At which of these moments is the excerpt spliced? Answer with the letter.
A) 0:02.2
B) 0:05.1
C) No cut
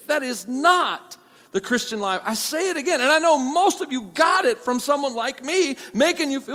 C